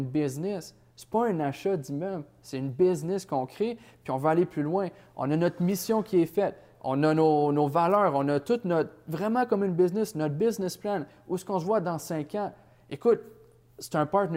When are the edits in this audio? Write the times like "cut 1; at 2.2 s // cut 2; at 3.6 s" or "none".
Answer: none